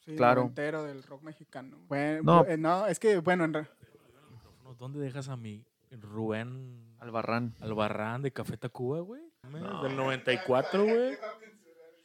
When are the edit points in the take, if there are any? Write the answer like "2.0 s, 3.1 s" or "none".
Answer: 9.4 s